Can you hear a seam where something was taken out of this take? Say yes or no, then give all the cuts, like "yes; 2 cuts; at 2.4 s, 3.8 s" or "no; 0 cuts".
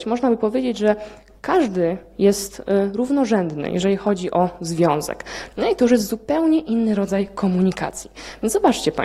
yes; 1 cut; at 5.5 s